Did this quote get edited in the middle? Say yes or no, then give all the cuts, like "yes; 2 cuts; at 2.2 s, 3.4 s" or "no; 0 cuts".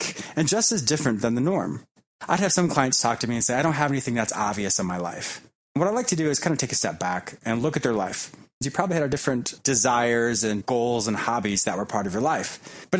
yes; 1 cut; at 8.6 s